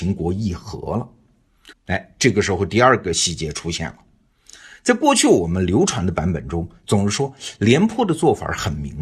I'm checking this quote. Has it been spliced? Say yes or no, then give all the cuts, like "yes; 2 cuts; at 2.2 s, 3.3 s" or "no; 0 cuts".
yes; 1 cut; at 1.7 s